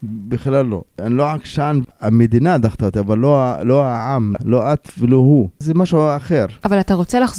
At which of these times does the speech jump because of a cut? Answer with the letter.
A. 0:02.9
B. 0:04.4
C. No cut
B